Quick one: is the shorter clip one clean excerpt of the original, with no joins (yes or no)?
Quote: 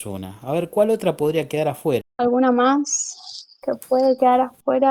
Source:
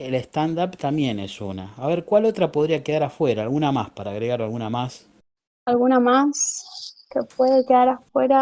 no